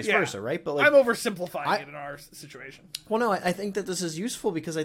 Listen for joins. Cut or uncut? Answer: uncut